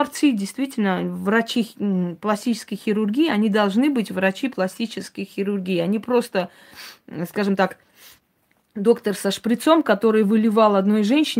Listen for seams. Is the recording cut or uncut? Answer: uncut